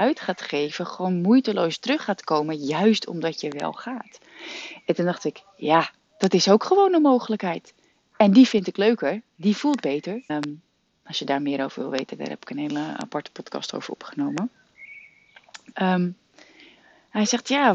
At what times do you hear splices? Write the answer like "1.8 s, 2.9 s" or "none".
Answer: 10.3 s, 15.7 s